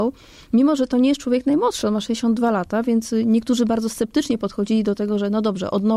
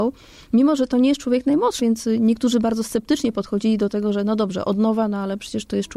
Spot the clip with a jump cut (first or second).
second